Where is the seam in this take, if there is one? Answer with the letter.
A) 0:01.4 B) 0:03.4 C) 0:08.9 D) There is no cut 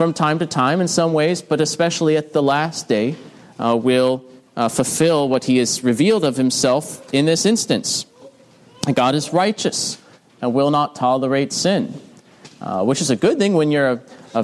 D